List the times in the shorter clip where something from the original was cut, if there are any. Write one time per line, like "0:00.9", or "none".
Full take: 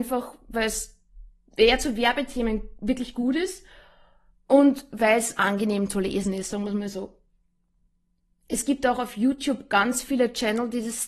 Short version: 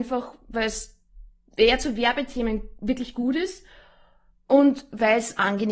none